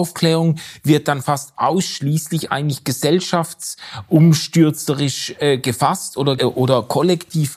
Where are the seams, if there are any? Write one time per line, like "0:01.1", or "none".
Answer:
0:06.4